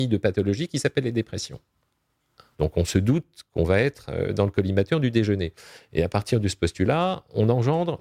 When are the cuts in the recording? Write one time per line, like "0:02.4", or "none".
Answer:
0:02.5